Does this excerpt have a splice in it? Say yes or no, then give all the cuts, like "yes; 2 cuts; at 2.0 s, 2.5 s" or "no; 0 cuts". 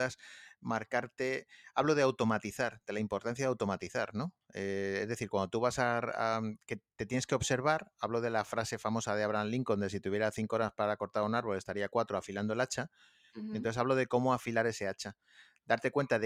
no; 0 cuts